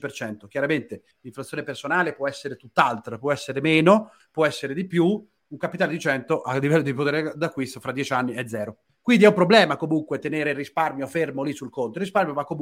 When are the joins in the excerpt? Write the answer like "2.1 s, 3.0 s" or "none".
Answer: 5.4 s